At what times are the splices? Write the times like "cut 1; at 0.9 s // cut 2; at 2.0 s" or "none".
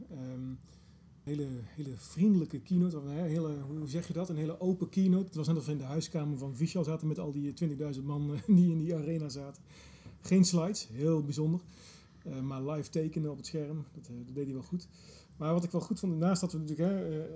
cut 1; at 1.3 s